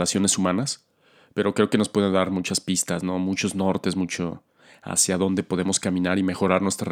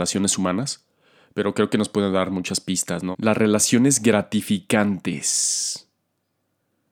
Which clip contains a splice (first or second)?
second